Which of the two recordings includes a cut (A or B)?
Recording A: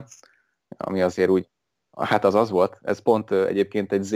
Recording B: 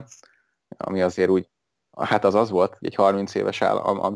B